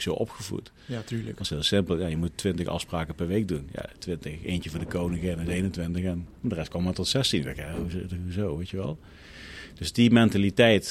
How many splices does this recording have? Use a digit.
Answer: 0